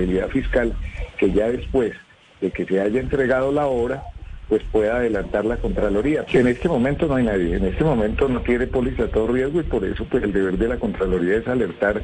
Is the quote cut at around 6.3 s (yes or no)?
yes